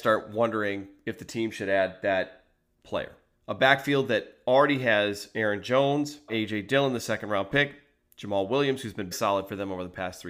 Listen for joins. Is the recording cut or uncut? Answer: cut